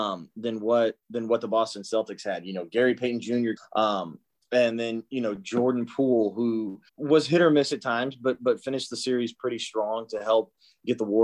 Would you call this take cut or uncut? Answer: cut